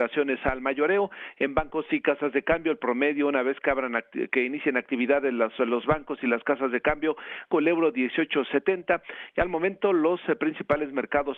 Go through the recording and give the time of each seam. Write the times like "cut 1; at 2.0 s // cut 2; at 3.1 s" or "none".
cut 1; at 7.5 s